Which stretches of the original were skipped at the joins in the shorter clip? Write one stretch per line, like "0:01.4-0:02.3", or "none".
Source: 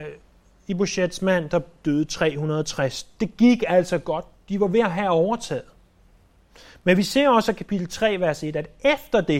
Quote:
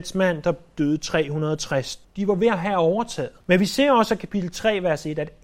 0:03.1-0:04.4
0:05.7-0:06.8